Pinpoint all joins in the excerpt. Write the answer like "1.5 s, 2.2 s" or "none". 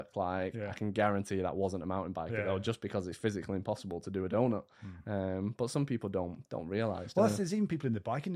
none